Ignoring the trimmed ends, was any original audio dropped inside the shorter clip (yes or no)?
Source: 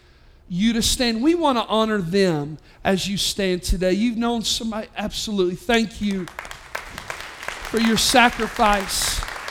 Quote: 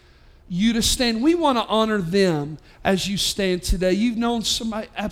no